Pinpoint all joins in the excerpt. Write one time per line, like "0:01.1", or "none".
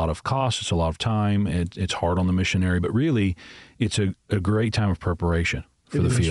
none